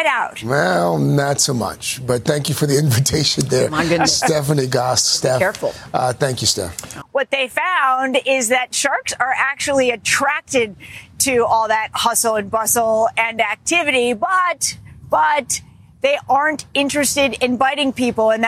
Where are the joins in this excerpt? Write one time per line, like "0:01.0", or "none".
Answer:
0:07.0